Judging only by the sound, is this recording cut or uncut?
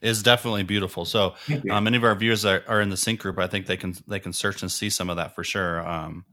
uncut